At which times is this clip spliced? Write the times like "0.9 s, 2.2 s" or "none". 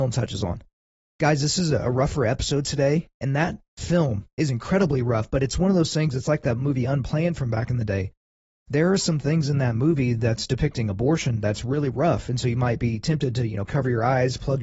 11.9 s